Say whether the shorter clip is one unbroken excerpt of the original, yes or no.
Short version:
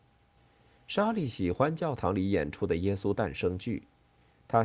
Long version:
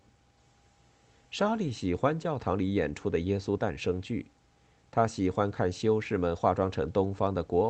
yes